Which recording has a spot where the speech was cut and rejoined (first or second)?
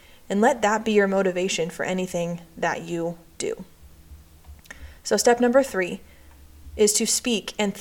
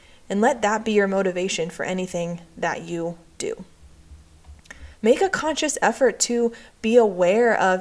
second